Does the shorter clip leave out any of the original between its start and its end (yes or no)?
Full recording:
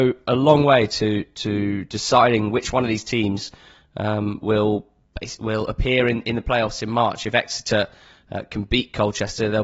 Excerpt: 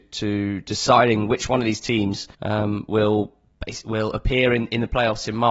yes